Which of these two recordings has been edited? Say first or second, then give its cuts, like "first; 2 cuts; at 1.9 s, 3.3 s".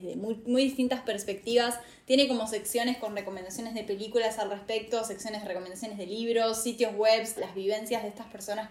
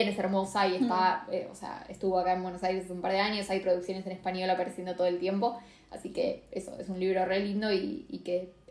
first; 1 cut; at 7.4 s